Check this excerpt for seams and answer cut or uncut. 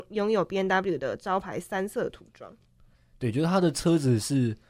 uncut